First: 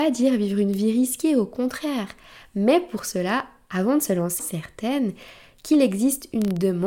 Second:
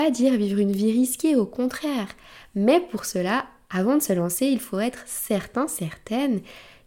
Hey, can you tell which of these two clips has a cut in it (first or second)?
first